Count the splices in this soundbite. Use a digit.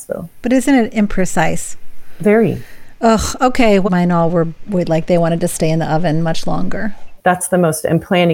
2